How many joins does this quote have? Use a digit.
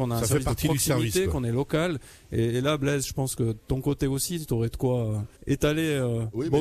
1